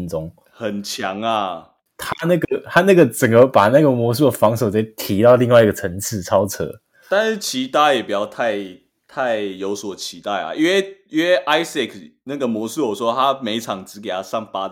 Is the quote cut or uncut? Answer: uncut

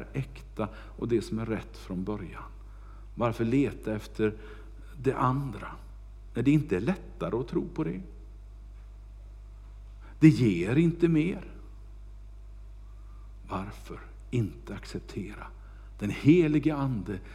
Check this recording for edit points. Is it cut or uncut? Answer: uncut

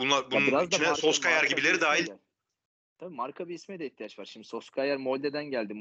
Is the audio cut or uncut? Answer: cut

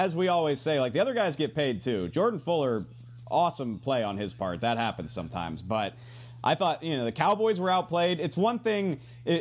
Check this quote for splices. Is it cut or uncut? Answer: uncut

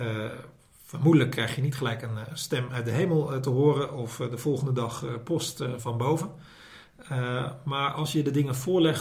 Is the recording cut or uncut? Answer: cut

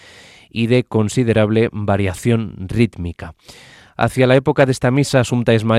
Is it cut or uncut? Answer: uncut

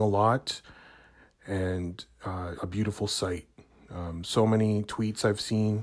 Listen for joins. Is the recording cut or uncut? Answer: cut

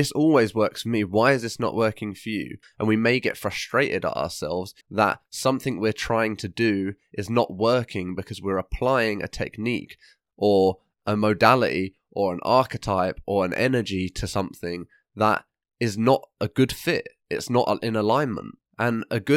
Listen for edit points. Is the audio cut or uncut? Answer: cut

